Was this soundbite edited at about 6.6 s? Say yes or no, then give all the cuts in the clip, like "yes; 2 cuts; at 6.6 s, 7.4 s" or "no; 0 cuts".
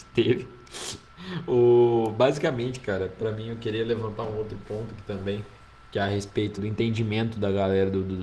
yes; 1 cut; at 6.6 s